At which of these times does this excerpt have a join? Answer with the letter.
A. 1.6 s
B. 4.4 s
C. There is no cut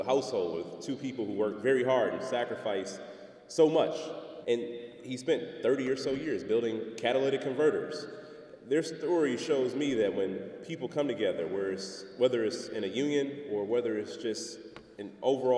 B